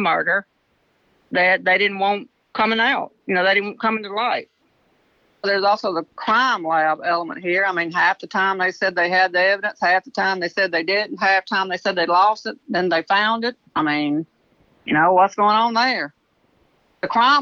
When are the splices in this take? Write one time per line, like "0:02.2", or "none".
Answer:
none